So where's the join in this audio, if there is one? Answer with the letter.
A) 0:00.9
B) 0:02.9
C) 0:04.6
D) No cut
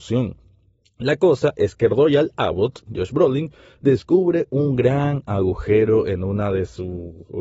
B